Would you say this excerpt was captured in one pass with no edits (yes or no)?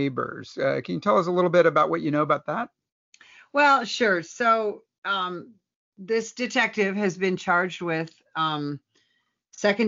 yes